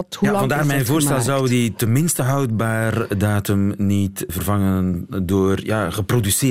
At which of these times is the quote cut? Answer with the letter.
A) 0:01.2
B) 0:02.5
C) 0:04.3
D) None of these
C